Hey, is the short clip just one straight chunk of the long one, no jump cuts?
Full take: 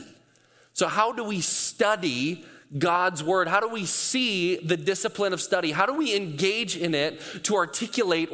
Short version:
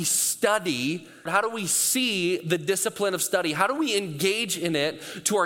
no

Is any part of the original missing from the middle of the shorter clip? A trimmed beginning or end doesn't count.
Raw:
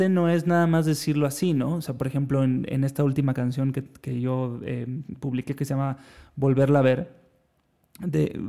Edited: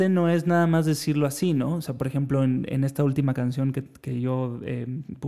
no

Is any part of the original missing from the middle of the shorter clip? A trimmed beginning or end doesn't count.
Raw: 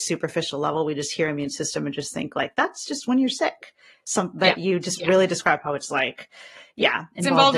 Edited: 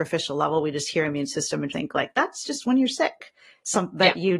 yes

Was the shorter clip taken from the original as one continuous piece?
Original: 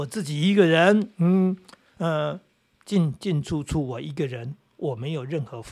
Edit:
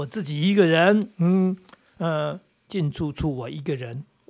no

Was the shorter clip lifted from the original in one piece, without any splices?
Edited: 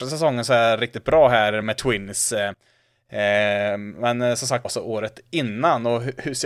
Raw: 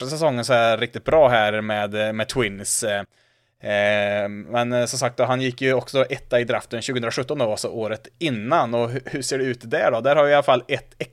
no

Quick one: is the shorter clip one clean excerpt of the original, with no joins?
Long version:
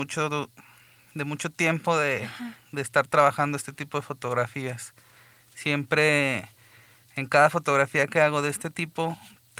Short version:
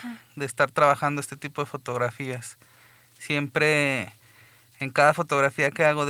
yes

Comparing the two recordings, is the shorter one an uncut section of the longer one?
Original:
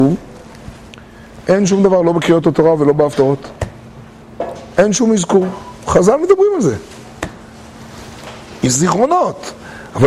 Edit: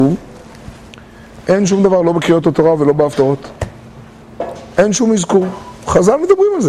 yes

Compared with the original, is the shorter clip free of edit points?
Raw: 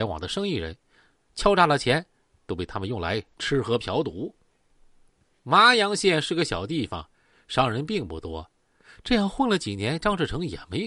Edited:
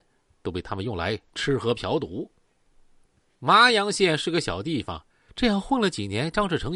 no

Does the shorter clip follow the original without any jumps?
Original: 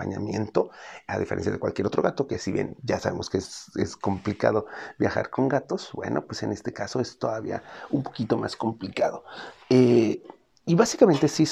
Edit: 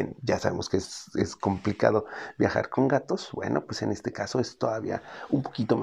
yes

